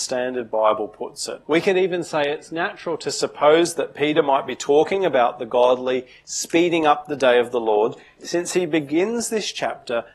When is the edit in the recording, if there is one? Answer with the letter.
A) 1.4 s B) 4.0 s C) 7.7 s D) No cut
A